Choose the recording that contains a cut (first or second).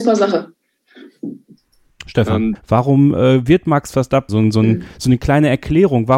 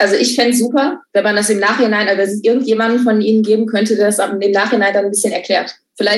first